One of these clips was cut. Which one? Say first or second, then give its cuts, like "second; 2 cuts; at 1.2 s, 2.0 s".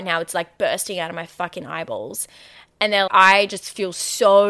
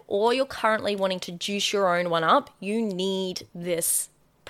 first; 1 cut; at 3.1 s